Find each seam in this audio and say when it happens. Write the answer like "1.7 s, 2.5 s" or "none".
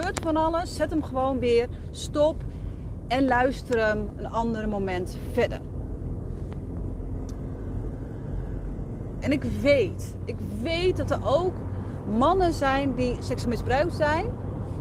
9.2 s